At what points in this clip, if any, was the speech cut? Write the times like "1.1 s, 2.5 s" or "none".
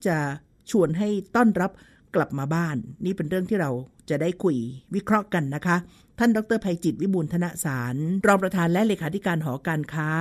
none